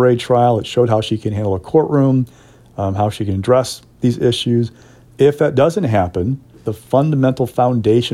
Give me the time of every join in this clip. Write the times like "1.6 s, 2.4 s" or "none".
5.0 s, 6.5 s